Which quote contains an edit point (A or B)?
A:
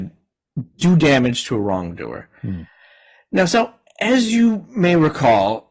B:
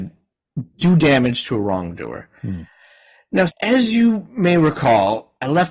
B